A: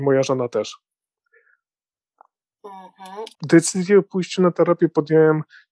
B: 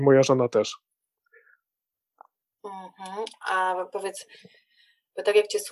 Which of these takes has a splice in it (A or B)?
A